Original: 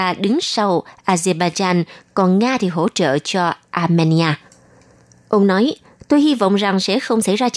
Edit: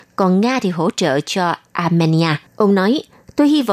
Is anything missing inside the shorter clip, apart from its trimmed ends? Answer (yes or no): yes